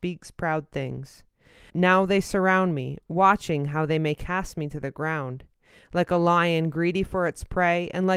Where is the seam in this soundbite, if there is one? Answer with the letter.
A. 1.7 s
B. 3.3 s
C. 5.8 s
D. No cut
A